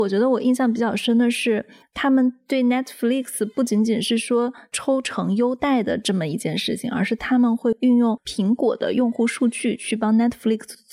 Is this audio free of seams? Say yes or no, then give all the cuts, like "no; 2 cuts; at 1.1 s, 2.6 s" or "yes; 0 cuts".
yes; 0 cuts